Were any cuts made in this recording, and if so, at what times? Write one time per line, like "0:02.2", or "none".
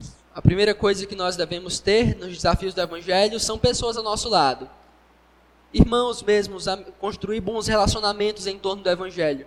none